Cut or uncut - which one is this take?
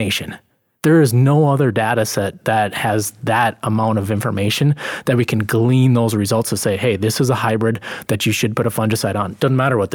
uncut